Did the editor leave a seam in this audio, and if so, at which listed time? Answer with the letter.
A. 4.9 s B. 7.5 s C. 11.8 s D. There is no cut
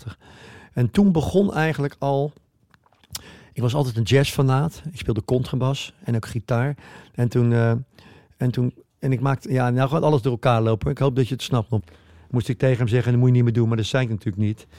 C